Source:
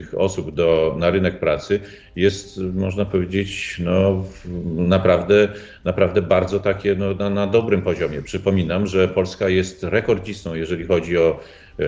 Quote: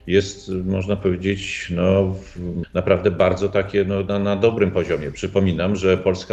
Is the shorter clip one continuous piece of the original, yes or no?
no